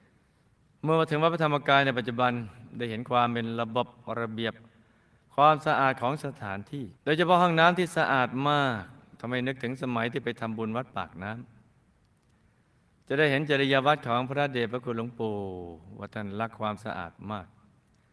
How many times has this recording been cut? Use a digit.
1